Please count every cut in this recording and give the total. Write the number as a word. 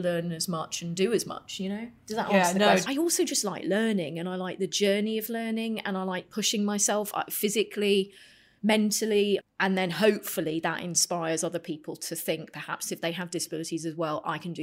two